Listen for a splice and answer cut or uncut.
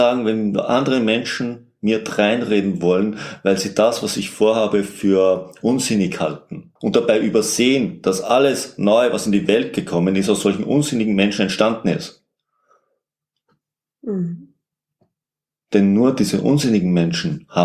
cut